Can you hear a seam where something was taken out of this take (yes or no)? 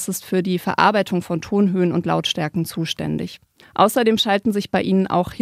yes